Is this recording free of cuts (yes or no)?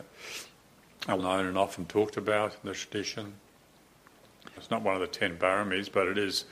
no